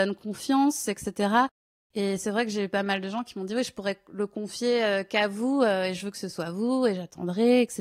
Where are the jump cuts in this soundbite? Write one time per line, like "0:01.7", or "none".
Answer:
none

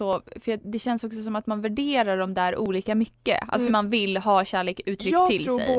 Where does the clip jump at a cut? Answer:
0:03.7

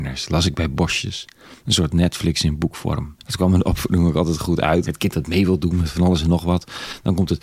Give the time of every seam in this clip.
0:03.2
0:04.8

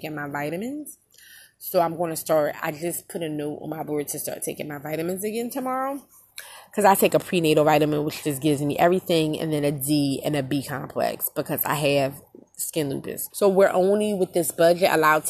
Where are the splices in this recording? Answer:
0:13.3

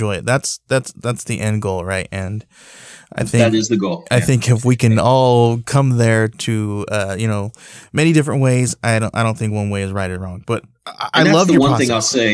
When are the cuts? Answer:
none

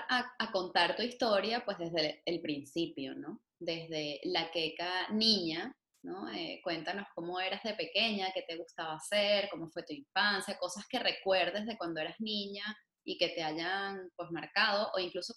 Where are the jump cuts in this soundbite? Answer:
none

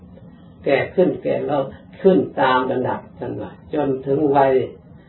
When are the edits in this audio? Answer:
0:03.1

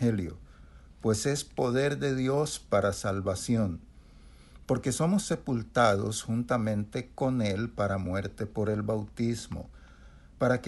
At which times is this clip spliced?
none

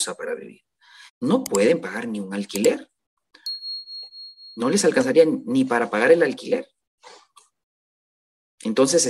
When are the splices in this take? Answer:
0:01.1

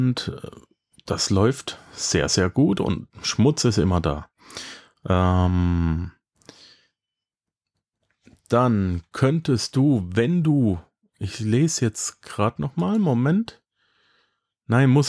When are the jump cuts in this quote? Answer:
none

